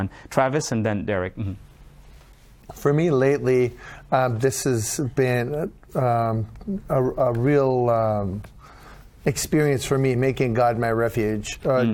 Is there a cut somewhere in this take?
no; 0 cuts

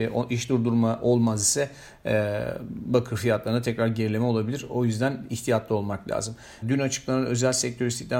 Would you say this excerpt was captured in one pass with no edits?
no; 1 cut; at 6.6 s

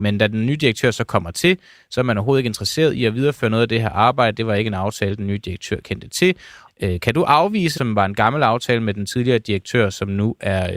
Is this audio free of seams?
no; 2 cuts; at 6.7 s, 7.8 s

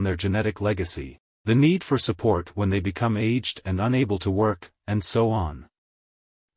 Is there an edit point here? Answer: no; 0 cuts

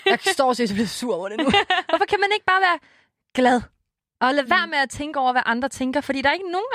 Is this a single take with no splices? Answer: yes; 0 cuts

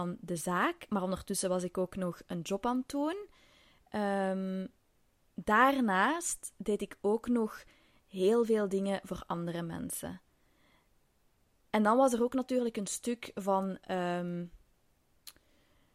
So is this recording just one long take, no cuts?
yes; 0 cuts

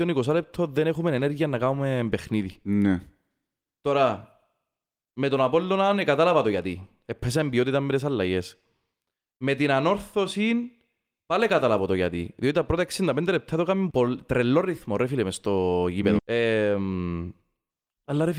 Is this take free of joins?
no; 2 cuts; at 13.9 s, 16.2 s

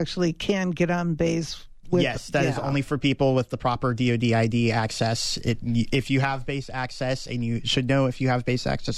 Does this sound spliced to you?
no; 0 cuts

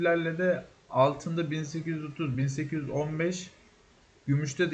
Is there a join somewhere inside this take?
no; 0 cuts

